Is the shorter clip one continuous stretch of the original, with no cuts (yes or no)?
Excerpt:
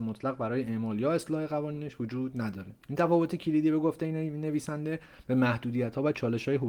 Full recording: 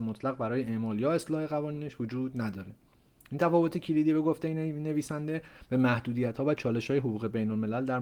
no